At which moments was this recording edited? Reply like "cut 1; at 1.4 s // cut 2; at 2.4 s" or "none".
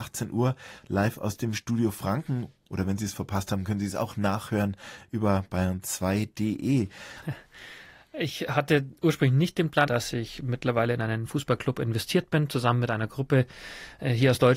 cut 1; at 7.2 s // cut 2; at 9.9 s